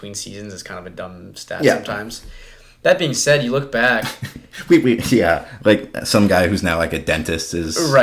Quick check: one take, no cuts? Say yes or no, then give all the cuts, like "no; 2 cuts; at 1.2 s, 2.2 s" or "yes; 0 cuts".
yes; 0 cuts